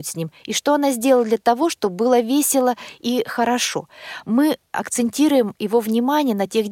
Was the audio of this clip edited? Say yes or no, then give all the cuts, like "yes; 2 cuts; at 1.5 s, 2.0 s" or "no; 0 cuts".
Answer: yes; 1 cut; at 4.2 s